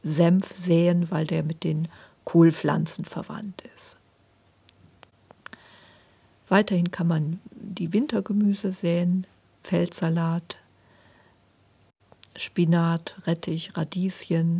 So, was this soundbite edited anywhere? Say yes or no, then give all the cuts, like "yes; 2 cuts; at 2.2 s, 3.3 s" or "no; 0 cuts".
no; 0 cuts